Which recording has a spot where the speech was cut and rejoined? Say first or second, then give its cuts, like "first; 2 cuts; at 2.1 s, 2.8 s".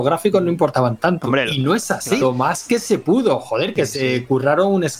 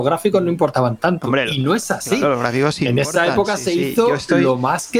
first; 1 cut; at 2.2 s